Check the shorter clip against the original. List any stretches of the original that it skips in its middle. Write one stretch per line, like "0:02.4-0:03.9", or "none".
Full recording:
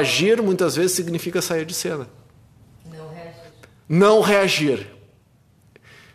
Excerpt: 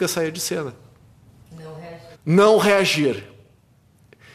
0:03.5-0:03.8